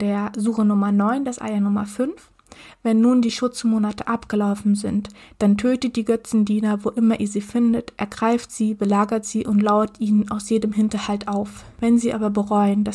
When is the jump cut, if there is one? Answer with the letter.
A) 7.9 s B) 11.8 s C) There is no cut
C